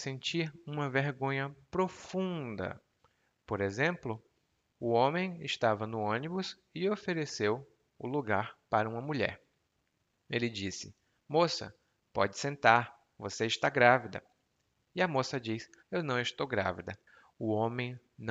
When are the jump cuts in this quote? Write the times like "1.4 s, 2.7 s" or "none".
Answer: 15.8 s